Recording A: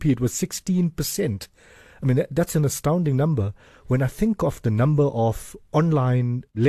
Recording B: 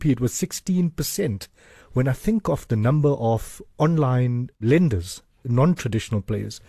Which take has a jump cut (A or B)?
B